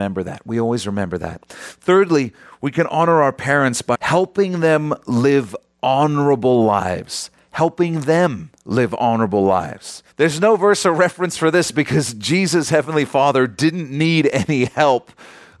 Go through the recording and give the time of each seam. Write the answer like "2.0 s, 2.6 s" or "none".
3.9 s, 10.1 s